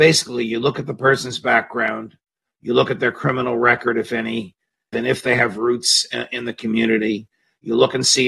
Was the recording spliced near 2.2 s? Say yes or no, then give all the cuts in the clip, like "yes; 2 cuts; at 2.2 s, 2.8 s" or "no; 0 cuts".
no; 1 cut; at 4.9 s